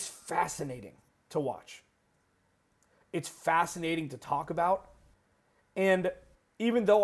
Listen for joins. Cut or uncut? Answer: uncut